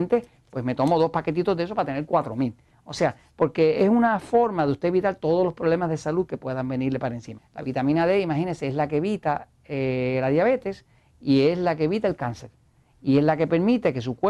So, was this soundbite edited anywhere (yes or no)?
yes